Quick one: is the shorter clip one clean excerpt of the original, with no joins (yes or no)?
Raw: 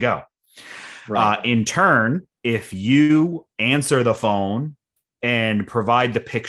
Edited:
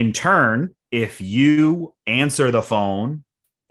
yes